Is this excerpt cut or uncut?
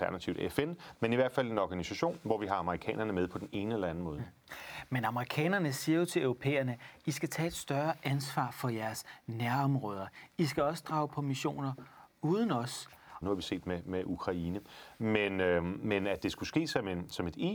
cut